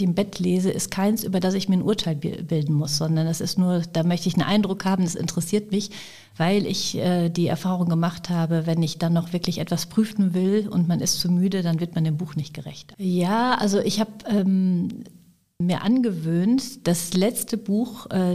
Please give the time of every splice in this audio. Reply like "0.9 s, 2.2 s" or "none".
12.9 s, 15.6 s